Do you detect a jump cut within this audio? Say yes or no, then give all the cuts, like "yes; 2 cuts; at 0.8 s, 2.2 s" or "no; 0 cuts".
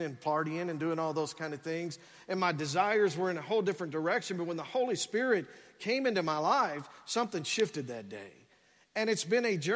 no; 0 cuts